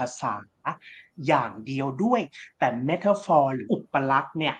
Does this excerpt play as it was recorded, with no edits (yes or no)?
no